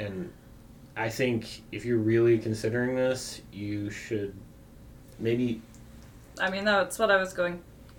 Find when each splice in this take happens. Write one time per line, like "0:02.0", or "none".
0:05.1
0:06.3